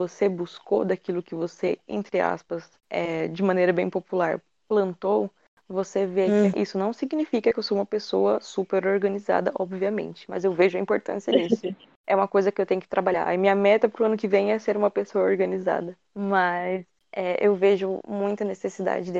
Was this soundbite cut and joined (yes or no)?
yes